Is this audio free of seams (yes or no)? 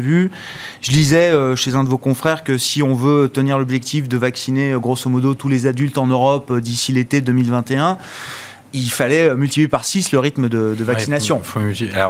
yes